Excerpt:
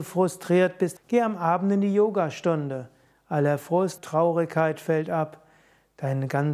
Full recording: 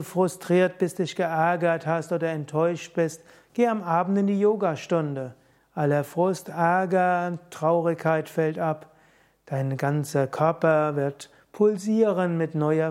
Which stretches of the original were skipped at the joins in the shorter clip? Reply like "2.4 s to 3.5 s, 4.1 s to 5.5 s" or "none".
1.0 s to 3.4 s, 6.4 s to 7.5 s

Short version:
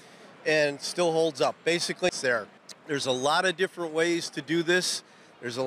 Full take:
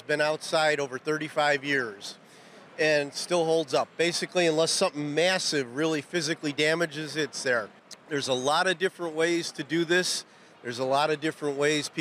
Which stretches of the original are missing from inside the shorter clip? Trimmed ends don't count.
4.4 s to 7.3 s

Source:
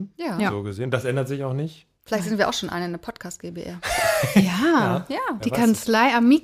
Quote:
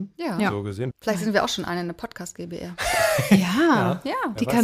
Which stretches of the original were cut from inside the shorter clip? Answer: 0.9 s to 2.0 s

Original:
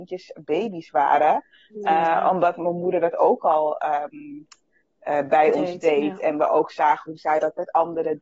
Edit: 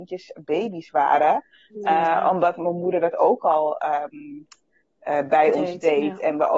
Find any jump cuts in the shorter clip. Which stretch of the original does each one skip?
none

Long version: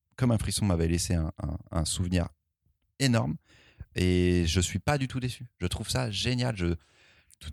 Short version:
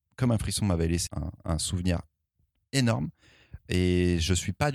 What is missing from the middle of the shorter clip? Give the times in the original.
1.1 s to 1.3 s

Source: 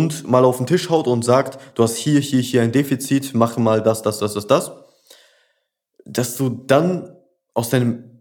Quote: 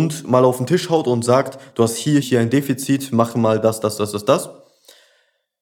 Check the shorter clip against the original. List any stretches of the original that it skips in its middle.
2.2 s to 2.4 s

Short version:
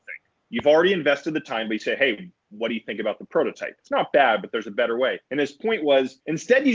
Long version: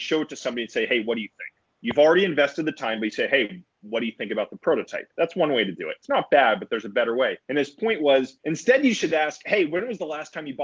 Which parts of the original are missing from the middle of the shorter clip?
5.1 s to 6.0 s

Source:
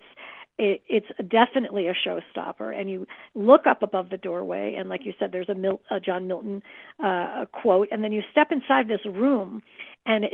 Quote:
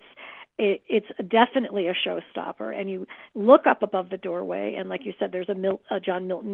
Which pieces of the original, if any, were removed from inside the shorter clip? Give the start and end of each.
none

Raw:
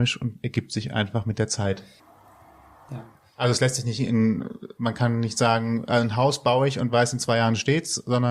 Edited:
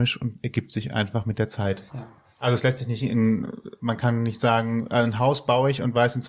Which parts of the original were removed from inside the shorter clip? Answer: 1.9 s to 2.8 s

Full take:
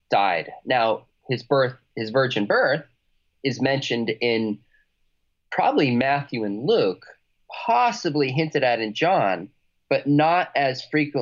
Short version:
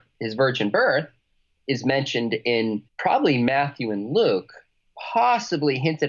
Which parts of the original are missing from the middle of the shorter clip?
4.6 s to 5.4 s

